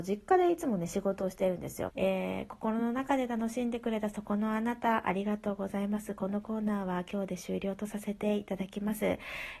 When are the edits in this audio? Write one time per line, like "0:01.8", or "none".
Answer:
0:01.9